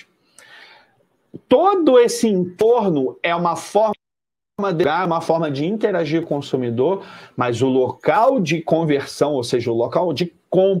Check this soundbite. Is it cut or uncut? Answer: uncut